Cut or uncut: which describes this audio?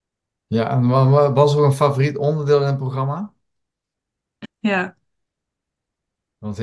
cut